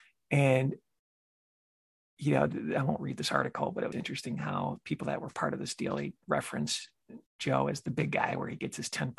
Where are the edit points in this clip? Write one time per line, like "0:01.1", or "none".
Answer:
0:03.9
0:07.3